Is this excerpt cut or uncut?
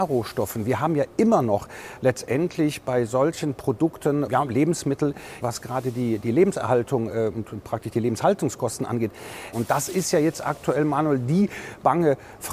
cut